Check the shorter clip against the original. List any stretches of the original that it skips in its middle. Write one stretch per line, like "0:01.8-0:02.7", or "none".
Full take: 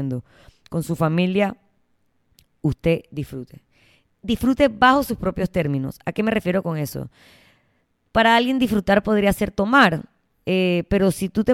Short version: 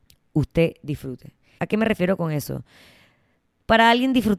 0:03.9-0:06.0